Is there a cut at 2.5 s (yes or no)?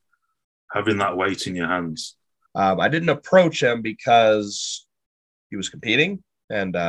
yes